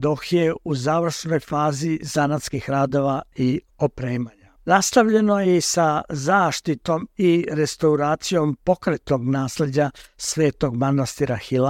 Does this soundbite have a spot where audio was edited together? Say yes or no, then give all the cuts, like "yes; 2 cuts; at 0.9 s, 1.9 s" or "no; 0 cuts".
yes; 1 cut; at 4.6 s